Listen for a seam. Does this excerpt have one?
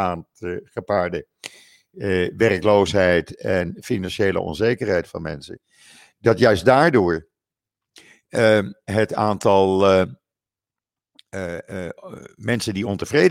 no; 0 cuts

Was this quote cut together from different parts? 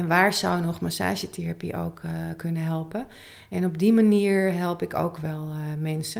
no; 0 cuts

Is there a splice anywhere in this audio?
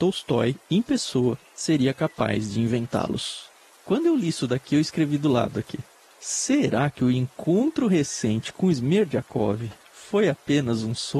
no; 0 cuts

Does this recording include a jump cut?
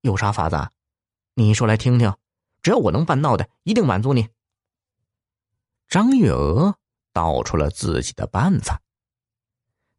no; 0 cuts

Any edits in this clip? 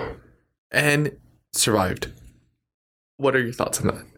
no; 0 cuts

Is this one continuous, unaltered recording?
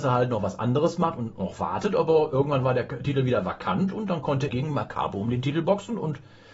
no; 1 cut; at 4.5 s

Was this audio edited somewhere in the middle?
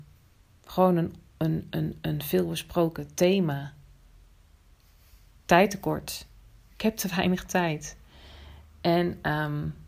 no; 0 cuts

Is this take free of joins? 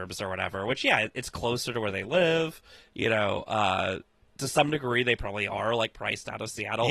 yes; 0 cuts

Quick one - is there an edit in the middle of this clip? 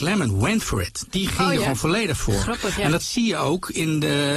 no; 0 cuts

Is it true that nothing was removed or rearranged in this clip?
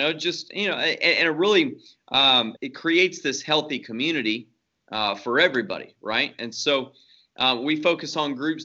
no; 1 cut; at 2.6 s

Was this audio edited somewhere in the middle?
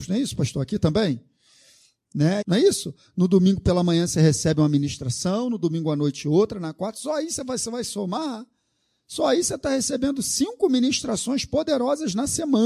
yes; 1 cut; at 2.4 s

